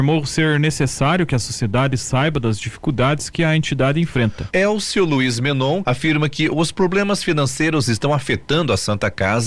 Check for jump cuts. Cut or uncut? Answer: cut